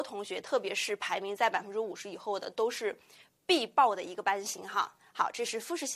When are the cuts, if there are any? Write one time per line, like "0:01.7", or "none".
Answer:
none